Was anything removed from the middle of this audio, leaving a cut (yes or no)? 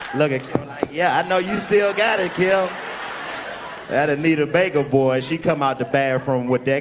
no